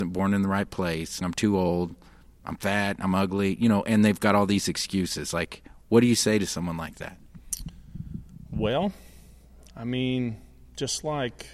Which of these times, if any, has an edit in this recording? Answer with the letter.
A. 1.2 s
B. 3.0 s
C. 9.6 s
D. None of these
A